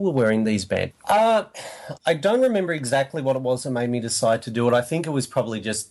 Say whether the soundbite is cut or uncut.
cut